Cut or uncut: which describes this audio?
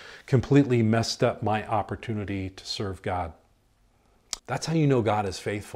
cut